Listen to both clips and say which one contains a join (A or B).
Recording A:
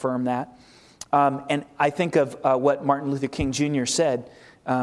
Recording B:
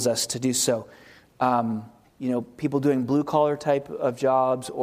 B